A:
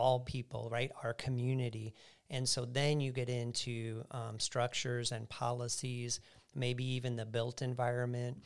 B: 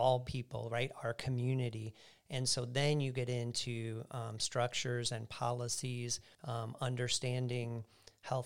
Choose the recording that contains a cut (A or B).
B